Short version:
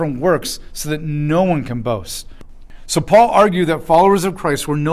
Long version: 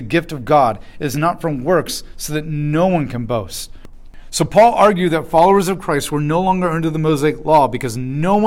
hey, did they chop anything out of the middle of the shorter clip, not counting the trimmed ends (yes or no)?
no